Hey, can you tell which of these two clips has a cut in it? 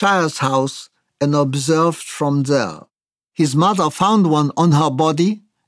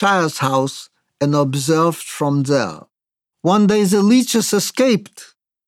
first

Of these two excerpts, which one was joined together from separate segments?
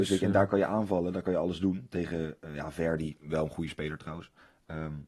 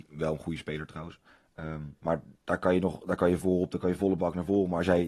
second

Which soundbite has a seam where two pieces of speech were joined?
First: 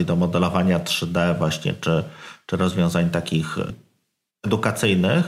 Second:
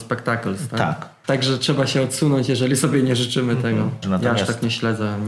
second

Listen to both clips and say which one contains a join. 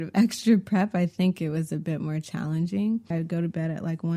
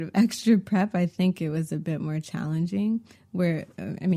first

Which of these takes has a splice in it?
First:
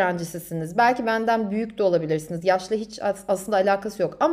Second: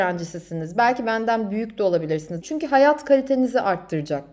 second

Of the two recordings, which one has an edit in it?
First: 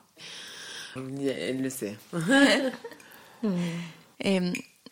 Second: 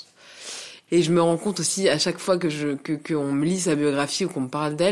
first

